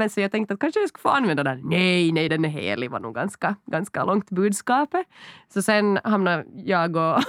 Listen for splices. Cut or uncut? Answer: uncut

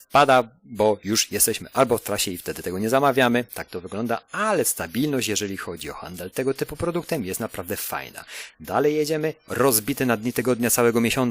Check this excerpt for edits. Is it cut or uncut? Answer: uncut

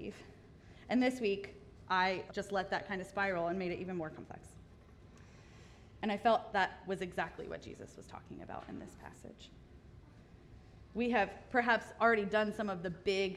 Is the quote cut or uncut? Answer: cut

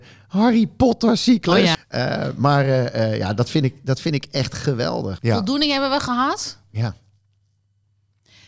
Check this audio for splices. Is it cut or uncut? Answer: cut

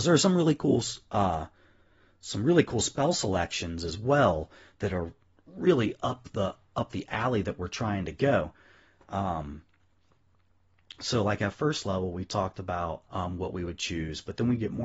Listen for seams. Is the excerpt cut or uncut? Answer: cut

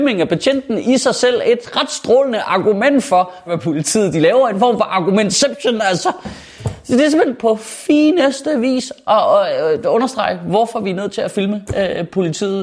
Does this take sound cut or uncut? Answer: cut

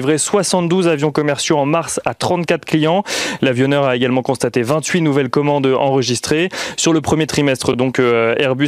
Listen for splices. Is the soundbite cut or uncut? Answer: uncut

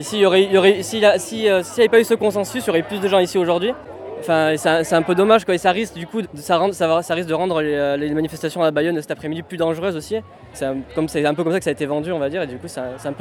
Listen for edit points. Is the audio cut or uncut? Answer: cut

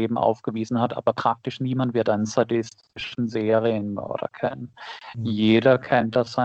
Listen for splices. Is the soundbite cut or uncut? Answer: uncut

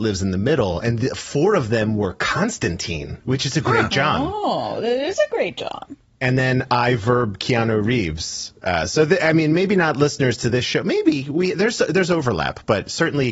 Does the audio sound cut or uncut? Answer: uncut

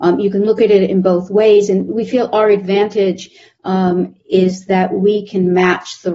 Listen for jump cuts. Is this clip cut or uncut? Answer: uncut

